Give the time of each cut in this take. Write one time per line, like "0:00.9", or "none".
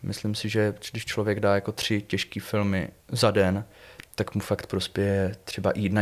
0:03.0